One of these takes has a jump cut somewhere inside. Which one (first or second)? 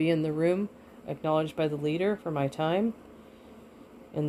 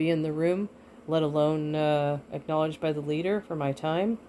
first